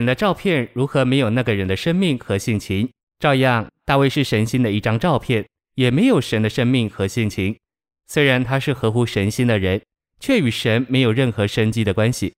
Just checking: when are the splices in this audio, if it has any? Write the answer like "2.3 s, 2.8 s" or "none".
none